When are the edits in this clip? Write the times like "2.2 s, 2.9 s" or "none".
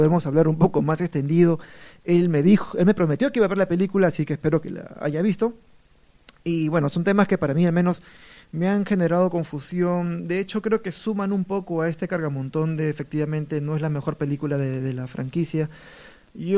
none